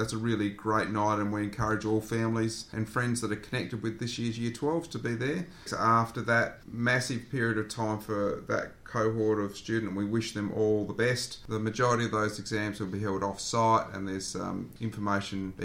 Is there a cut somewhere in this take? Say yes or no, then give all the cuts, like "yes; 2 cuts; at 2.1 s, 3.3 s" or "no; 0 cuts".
yes; 1 cut; at 5.7 s